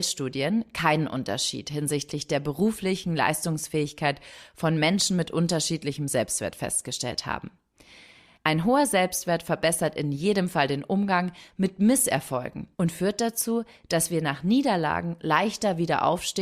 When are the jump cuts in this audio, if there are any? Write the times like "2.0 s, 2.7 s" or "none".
8.4 s, 12.7 s